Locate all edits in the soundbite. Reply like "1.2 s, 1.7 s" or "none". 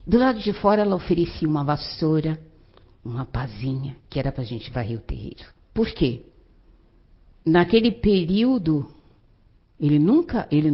5.7 s